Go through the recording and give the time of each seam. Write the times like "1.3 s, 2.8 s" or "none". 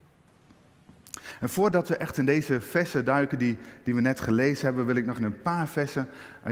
5.2 s